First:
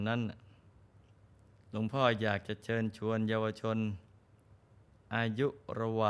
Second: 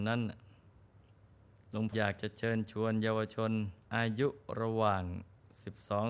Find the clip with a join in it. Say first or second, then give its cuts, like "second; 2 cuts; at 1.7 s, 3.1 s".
second; 2 cuts; at 1.9 s, 3.8 s